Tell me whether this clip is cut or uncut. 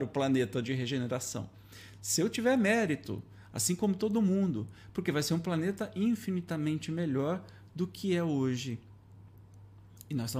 uncut